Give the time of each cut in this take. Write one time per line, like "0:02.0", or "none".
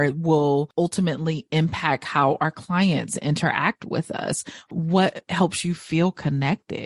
0:04.7